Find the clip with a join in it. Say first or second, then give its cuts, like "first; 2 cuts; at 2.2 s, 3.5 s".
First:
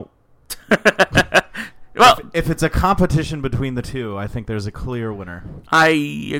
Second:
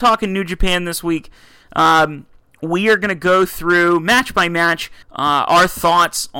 second; 1 cut; at 5.0 s